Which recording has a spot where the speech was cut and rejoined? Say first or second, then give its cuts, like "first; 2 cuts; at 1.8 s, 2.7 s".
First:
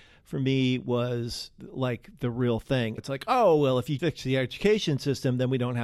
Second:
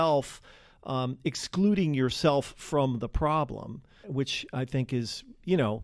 first; 2 cuts; at 3.0 s, 4.0 s